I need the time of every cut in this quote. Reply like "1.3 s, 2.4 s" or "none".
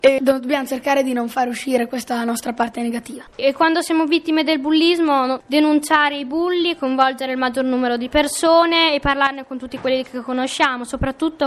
5.4 s